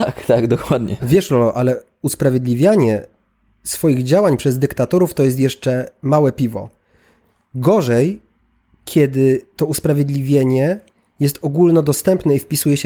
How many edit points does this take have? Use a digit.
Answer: 1